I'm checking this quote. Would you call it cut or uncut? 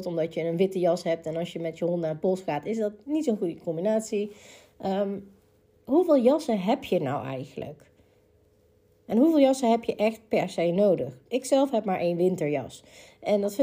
uncut